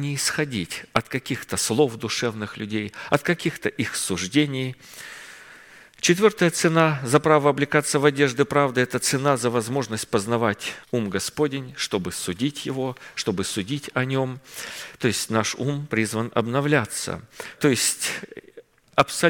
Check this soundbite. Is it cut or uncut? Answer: cut